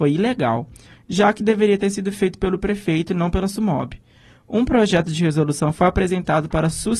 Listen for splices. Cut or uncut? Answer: uncut